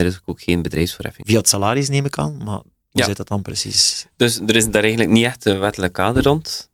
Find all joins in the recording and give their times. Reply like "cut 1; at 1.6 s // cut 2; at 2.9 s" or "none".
cut 1; at 1.2 s